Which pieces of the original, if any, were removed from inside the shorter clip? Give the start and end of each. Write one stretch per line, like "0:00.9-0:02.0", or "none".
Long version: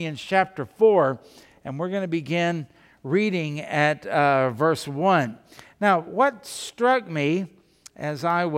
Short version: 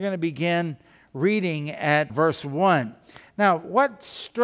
0:04.0-0:04.5